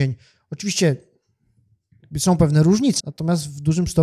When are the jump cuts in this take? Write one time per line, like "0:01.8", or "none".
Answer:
0:03.0